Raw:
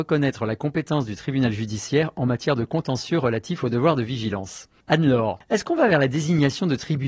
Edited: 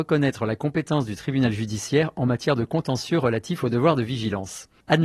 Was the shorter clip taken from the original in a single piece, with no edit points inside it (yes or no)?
yes